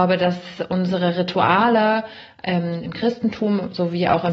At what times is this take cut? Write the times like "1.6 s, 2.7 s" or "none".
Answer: none